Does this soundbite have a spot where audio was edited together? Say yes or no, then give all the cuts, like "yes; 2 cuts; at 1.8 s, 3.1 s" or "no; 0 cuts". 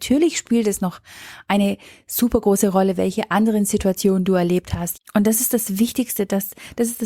yes; 1 cut; at 4.9 s